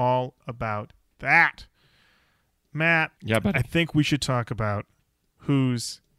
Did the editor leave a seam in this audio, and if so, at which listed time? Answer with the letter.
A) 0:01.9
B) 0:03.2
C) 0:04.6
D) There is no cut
B